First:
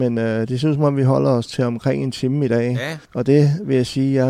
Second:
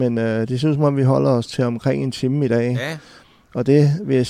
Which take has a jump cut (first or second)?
first